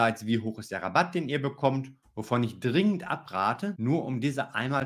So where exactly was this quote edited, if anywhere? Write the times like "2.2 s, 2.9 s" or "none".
2.0 s, 3.7 s